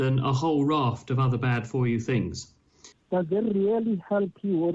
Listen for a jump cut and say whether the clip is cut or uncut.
cut